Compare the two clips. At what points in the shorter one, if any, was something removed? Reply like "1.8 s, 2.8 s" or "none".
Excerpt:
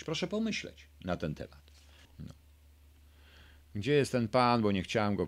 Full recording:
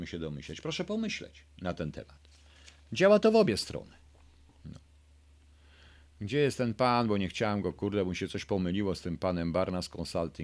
2.0 s